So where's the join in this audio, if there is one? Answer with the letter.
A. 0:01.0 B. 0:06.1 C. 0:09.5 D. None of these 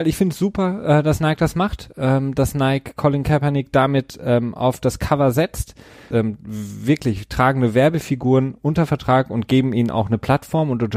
B